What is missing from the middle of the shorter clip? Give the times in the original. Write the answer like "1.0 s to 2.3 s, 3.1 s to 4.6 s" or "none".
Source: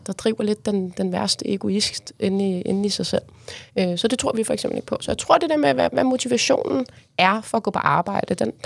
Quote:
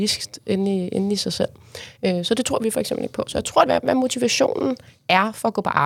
5.4 s to 5.7 s